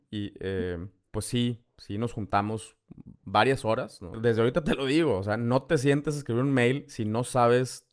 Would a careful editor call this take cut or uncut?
cut